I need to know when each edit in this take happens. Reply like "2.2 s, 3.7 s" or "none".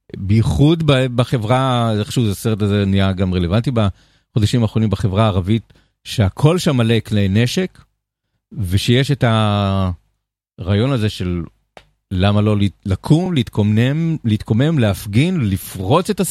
none